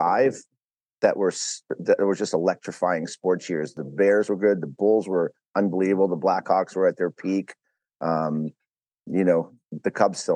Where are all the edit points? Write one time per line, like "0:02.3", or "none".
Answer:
none